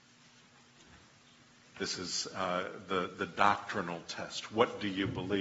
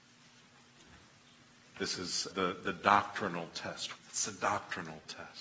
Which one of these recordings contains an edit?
second; 2 cuts; at 2.3 s, 4.0 s

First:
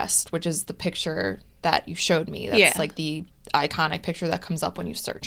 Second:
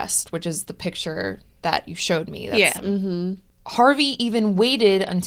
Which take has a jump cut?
second; 1 cut; at 2.8 s

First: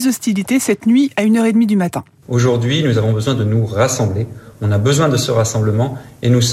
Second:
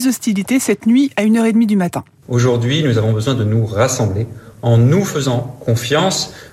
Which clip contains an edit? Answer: first; 1 cut; at 4.5 s

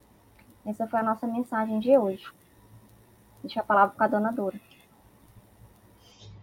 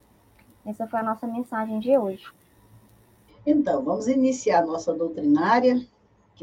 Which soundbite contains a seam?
second; 1 cut; at 3.3 s

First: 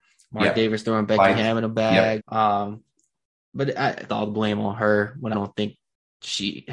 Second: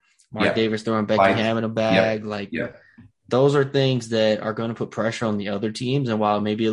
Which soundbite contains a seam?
first; 3 cuts; at 2.2 s, 4.1 s, 5.3 s

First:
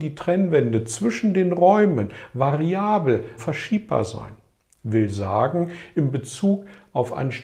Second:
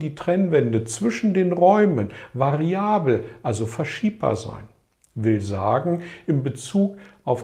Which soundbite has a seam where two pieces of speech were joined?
first; 1 cut; at 3.4 s

